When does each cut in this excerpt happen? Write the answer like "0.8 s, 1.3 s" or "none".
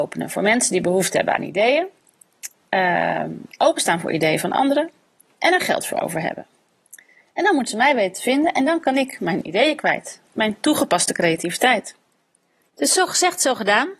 none